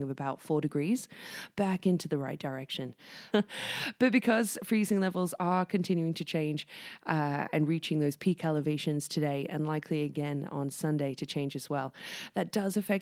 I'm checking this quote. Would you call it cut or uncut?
cut